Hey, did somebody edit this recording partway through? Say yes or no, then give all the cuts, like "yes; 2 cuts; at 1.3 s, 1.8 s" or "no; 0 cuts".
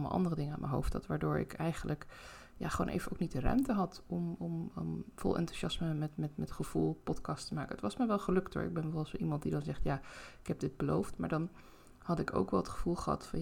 no; 0 cuts